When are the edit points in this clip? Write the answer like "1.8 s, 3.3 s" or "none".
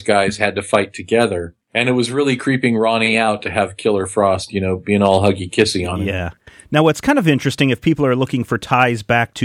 1.6 s